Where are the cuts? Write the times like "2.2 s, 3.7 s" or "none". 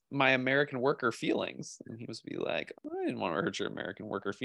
2.7 s